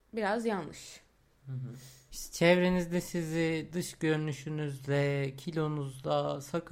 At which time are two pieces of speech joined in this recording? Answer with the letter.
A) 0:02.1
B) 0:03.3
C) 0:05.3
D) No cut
A